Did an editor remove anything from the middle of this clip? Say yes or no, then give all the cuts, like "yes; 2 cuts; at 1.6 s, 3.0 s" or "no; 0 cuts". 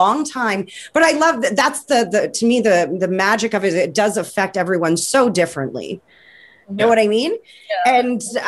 yes; 1 cut; at 6.8 s